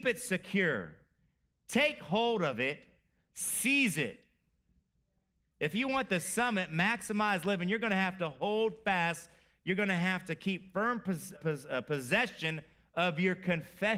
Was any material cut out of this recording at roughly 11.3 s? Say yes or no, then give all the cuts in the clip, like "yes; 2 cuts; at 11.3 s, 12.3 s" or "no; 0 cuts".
yes; 1 cut; at 11.3 s